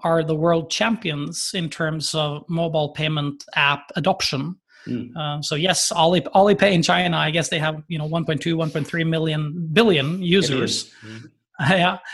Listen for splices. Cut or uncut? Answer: uncut